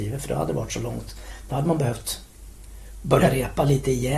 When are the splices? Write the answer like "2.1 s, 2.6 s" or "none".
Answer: none